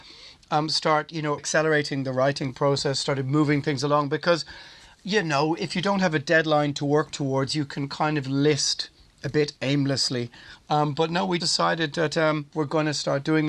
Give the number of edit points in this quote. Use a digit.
3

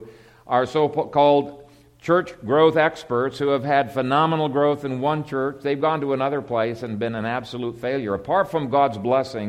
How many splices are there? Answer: 0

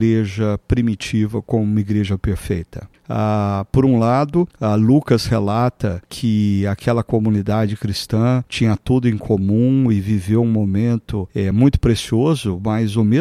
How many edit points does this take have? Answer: 0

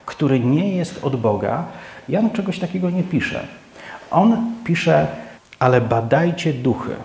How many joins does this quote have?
2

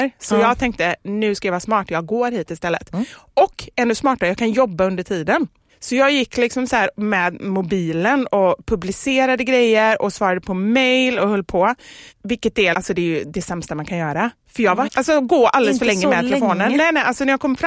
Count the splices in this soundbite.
2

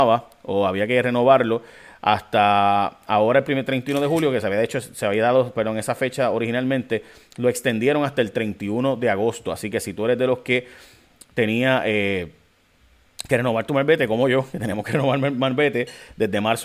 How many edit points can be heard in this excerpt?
0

